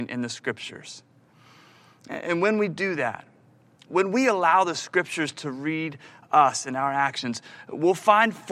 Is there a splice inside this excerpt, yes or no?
no